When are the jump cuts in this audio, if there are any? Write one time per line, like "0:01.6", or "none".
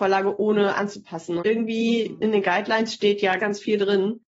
0:01.4
0:03.4